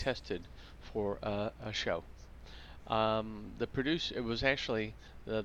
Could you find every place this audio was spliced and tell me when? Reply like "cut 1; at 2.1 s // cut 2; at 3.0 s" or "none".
none